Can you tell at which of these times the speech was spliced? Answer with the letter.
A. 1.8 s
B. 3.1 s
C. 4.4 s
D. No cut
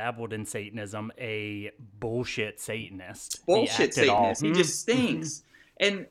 C